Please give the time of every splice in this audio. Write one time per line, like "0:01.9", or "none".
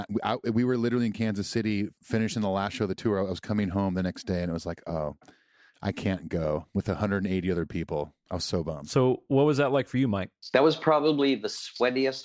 none